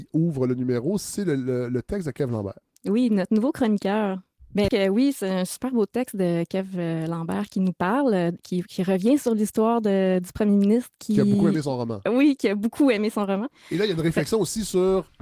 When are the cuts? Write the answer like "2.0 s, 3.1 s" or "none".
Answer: 4.7 s